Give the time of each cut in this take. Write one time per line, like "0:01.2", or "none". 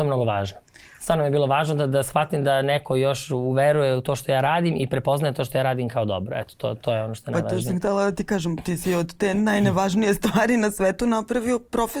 none